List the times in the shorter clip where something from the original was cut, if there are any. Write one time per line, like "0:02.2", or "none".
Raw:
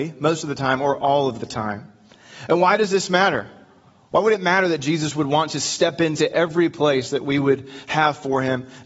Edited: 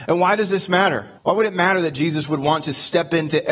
0:01.2